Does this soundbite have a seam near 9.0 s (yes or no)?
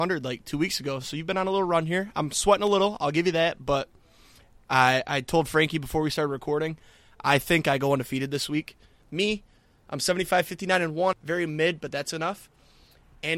yes